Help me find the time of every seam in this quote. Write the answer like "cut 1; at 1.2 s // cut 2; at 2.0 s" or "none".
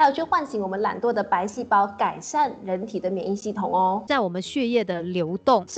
cut 1; at 4.1 s